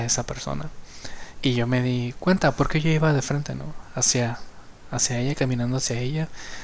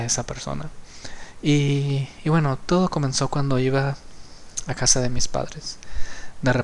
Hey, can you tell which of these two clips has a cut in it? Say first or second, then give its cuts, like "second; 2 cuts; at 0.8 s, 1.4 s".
first; 1 cut; at 1.3 s